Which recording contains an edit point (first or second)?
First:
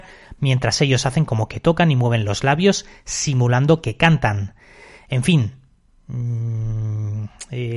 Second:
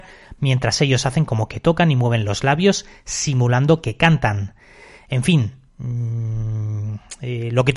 second